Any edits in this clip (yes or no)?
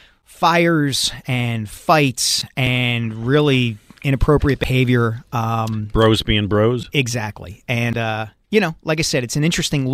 no